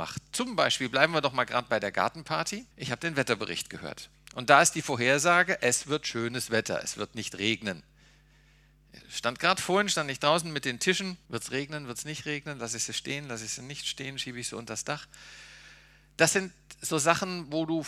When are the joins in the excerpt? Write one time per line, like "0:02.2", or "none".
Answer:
0:02.7
0:11.3